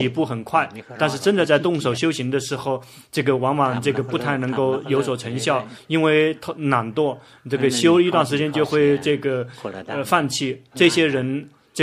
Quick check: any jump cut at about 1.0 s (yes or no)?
no